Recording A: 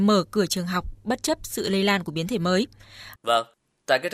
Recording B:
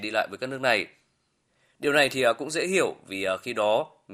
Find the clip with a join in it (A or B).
A